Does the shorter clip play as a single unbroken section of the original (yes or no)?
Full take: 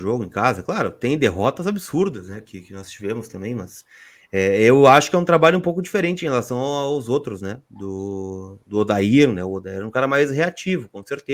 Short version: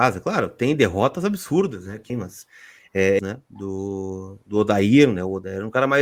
no